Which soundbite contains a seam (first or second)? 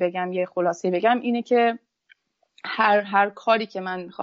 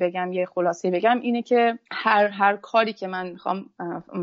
second